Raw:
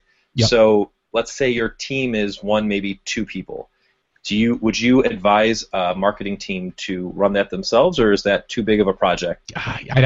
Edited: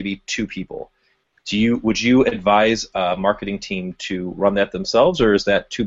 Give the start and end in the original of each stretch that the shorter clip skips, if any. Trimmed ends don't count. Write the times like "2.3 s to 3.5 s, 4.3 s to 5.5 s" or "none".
none